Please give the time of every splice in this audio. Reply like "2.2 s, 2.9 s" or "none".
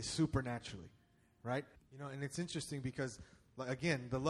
1.7 s